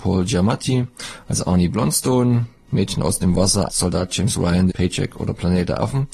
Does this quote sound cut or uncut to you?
cut